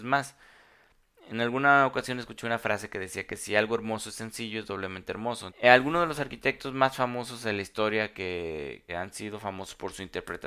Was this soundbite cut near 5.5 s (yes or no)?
yes